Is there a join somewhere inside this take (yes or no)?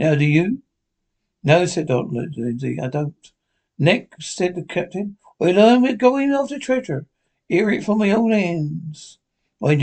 no